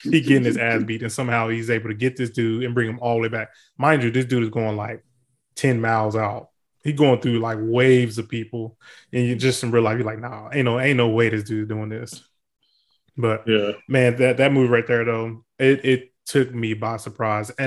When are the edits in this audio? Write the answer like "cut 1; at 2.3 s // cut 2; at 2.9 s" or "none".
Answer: none